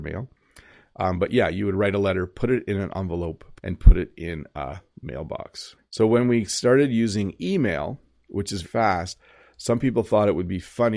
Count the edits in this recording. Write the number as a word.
three